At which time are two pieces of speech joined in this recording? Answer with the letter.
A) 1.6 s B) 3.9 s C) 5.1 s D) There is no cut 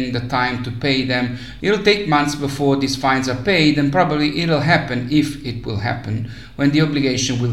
A